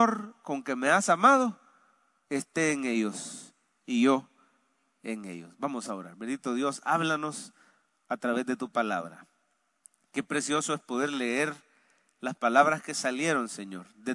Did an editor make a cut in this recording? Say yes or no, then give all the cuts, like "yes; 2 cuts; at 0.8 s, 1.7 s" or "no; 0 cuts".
no; 0 cuts